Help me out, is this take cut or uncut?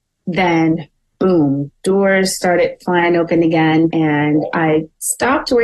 cut